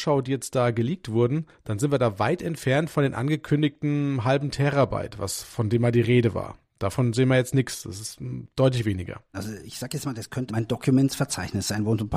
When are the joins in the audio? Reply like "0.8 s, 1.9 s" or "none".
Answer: 9.3 s, 10.5 s